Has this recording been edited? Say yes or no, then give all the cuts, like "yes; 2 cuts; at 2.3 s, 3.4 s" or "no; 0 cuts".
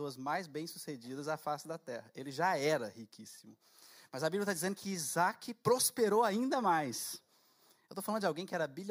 no; 0 cuts